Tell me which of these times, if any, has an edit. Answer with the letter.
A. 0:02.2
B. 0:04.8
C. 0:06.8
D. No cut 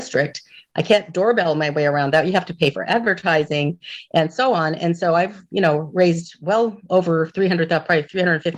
D